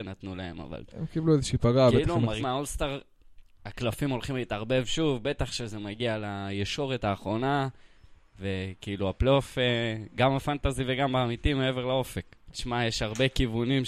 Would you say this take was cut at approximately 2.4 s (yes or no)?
yes